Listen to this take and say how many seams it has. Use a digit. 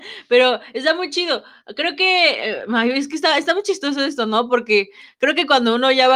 0